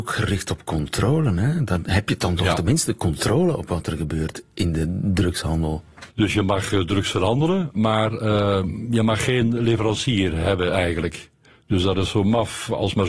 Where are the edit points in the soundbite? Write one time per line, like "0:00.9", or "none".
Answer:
0:06.1